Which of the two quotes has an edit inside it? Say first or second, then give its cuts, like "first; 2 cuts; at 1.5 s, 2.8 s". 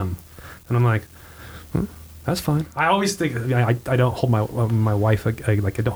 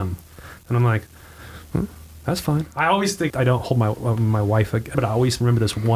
second; 2 cuts; at 3.3 s, 4.9 s